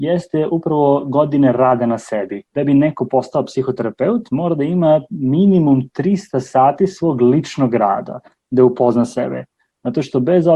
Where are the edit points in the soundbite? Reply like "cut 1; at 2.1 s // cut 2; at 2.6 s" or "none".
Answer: cut 1; at 2.5 s